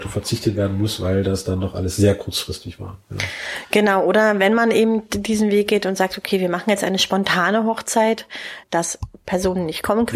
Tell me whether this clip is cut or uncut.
cut